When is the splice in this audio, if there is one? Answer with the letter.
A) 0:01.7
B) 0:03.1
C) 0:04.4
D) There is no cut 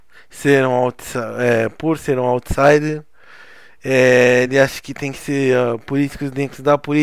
D